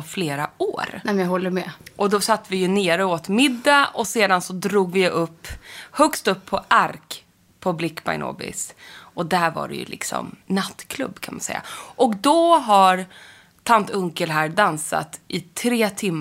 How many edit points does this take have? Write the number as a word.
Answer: one